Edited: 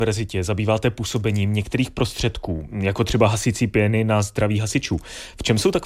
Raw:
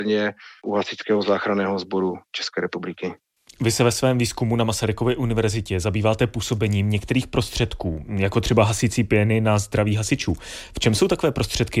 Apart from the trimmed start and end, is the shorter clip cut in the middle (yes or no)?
no